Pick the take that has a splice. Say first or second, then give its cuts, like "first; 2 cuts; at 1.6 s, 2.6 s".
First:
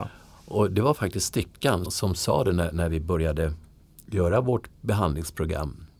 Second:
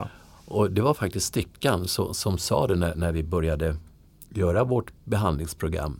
first; 1 cut; at 1.8 s